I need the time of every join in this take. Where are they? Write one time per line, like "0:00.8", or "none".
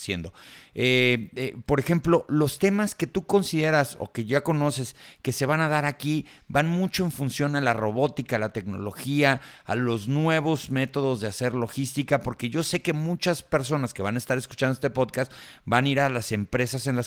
none